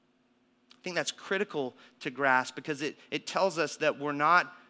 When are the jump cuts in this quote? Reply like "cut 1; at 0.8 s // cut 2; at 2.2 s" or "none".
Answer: none